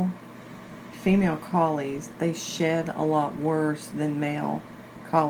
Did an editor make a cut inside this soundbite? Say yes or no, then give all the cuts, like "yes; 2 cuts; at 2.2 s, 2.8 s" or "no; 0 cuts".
yes; 1 cut; at 0.9 s